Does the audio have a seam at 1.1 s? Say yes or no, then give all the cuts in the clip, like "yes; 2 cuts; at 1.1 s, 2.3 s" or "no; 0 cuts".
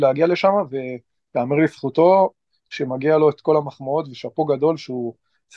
no; 0 cuts